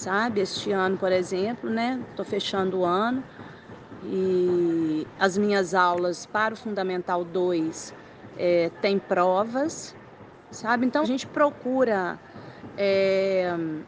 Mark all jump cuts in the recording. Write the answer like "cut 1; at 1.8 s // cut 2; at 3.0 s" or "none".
cut 1; at 11.0 s

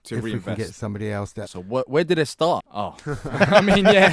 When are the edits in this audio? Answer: cut 1; at 1.4 s // cut 2; at 2.6 s

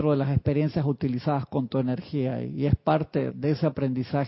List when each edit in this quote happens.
cut 1; at 3.3 s

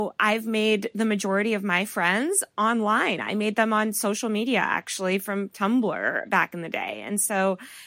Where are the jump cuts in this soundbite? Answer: none

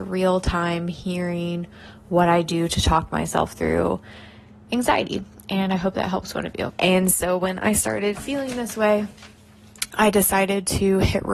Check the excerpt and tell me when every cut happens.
cut 1; at 6.7 s

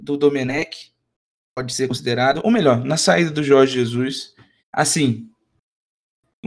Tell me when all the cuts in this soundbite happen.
cut 1; at 4.6 s

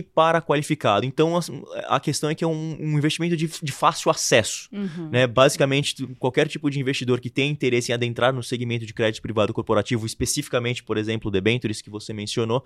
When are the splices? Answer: none

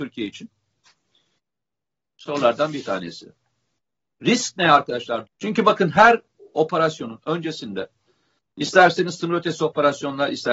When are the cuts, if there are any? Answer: cut 1; at 5.3 s

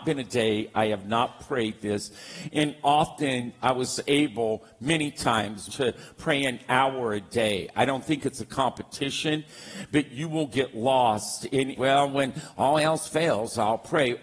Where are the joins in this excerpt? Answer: cut 1; at 5.7 s // cut 2; at 11.7 s

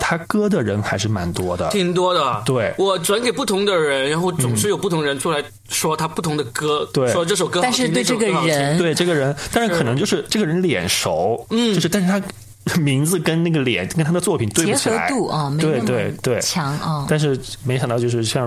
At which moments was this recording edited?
none

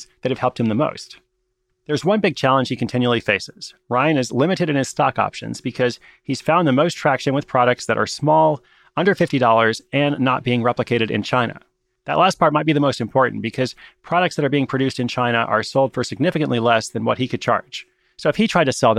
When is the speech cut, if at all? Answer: none

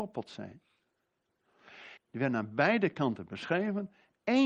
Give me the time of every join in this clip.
cut 1; at 2.0 s

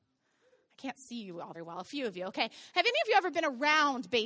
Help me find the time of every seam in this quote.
cut 1; at 1.5 s

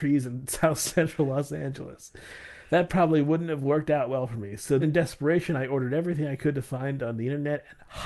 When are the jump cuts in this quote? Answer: cut 1; at 4.8 s

